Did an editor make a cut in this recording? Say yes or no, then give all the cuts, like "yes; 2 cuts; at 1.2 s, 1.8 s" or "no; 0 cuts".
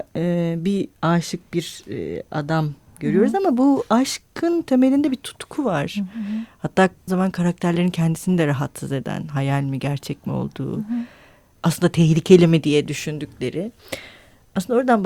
yes; 1 cut; at 7.1 s